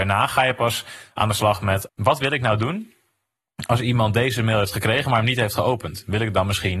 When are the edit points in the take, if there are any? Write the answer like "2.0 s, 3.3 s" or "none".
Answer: 1.9 s

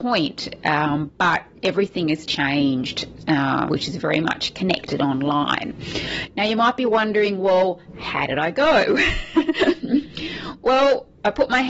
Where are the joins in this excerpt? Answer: 2.3 s, 3.7 s

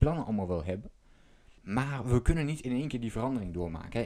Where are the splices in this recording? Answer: 1.6 s

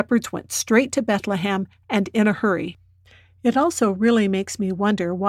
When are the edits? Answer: none

